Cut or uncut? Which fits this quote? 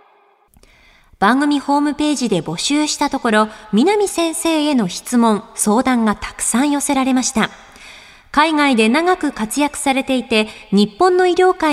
uncut